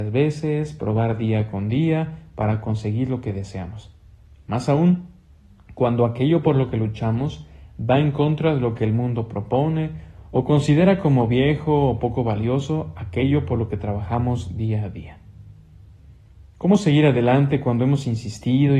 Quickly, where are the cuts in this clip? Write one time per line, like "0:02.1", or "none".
none

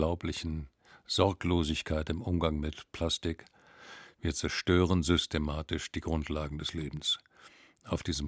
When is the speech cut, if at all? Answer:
none

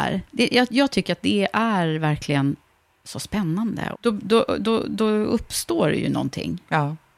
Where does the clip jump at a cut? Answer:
0:03.9

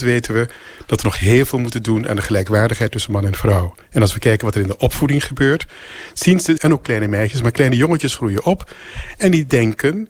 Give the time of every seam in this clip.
0:06.6

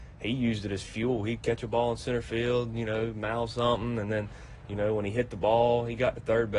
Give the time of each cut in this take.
none

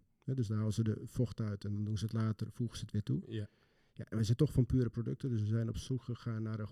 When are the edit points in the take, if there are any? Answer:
none

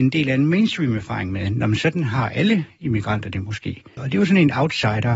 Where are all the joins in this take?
0:04.0

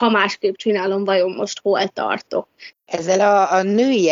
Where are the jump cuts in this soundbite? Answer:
0:02.7

